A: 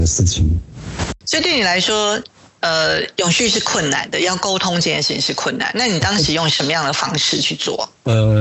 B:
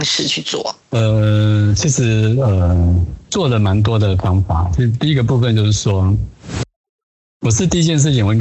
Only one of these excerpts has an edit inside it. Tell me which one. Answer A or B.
A